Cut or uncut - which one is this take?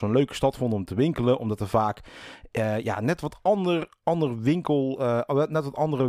uncut